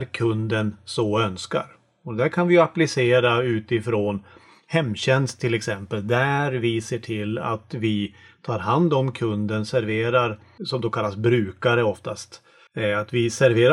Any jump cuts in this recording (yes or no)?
no